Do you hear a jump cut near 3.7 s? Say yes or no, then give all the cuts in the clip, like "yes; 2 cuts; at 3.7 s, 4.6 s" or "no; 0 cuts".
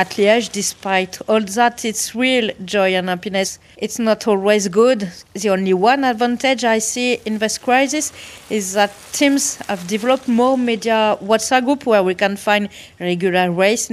yes; 2 cuts; at 3.7 s, 5.3 s